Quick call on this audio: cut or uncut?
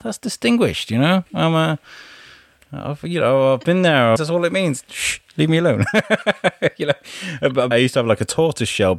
cut